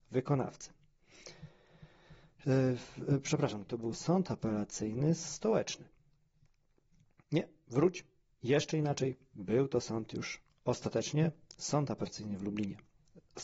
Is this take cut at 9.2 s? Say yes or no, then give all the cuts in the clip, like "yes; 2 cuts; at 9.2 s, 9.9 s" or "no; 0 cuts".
no; 1 cut; at 3.7 s